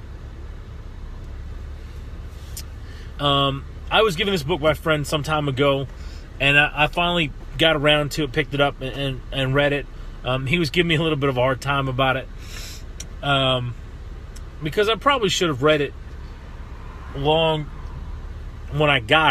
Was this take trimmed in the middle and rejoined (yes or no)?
yes